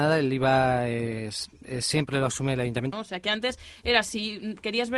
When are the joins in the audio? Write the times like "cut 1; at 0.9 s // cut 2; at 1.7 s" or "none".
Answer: cut 1; at 2.9 s